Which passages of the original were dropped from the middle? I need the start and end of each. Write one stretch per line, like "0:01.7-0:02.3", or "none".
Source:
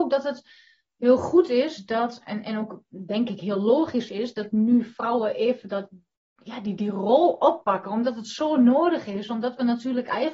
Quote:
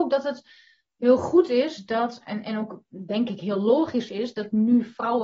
none